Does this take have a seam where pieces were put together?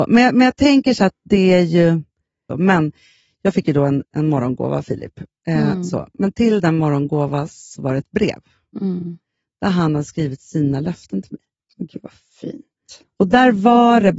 yes; 1 cut; at 2.5 s

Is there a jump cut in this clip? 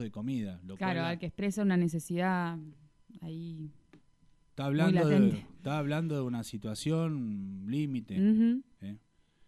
no; 0 cuts

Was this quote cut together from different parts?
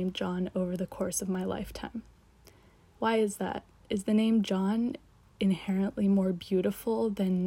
no; 0 cuts

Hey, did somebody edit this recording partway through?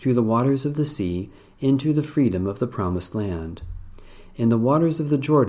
no; 0 cuts

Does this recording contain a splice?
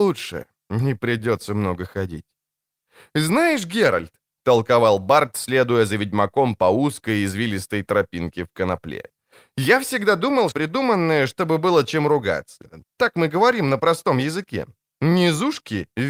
yes; 2 cuts; at 10.5 s, 12.8 s

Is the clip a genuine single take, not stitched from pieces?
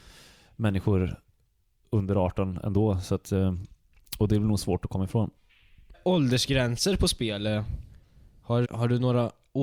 no; 2 cuts; at 5.9 s, 8.6 s

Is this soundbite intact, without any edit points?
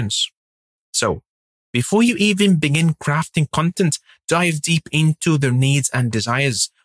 yes; 0 cuts

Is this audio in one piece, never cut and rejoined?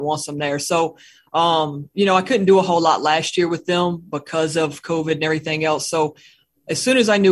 yes; 0 cuts

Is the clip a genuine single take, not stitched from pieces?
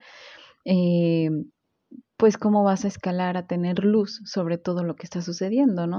yes; 0 cuts

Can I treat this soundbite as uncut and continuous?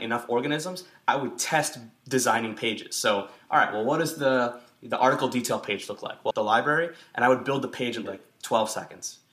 no; 2 cuts; at 6.3 s, 8.1 s

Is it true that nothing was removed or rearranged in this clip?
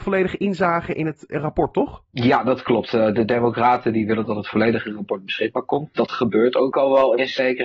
yes; 0 cuts

